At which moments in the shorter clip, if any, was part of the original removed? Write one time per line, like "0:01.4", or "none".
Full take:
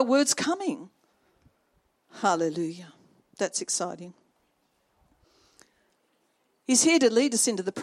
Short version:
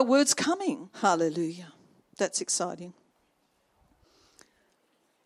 0:00.9